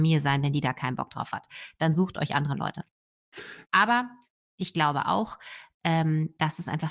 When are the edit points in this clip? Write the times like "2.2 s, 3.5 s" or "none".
3.6 s

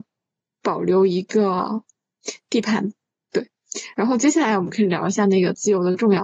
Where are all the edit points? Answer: none

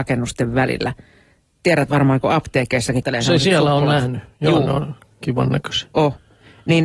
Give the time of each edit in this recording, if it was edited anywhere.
3.0 s

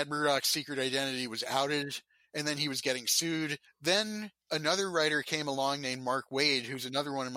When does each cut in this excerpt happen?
3.6 s

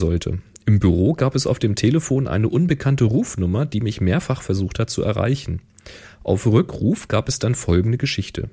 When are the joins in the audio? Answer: none

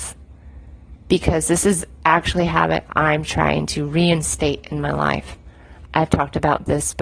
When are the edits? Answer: 5.9 s

